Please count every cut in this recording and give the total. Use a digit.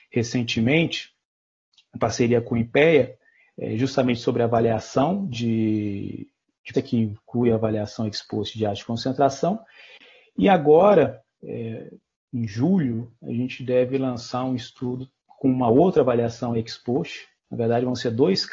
1